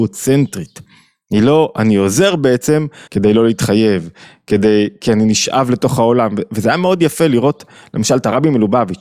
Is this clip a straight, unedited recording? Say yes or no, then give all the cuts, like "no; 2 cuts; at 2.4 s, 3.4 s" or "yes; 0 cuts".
no; 1 cut; at 3.1 s